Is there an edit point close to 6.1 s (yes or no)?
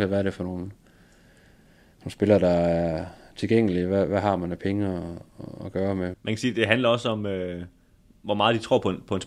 yes